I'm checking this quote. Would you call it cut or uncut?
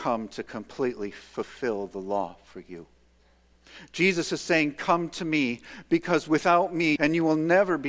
cut